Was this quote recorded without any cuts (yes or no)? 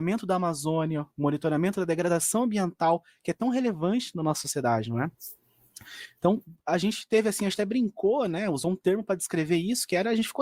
yes